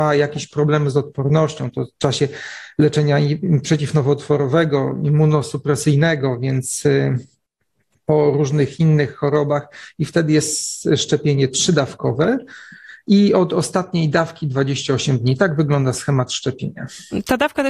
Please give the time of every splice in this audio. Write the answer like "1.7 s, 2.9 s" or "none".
none